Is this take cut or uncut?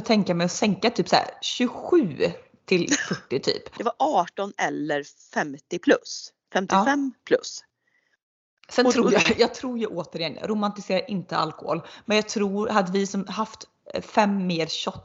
cut